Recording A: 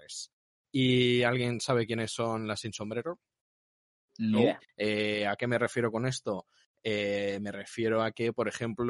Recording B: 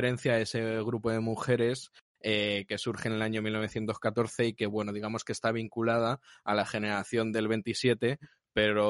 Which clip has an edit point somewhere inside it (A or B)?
A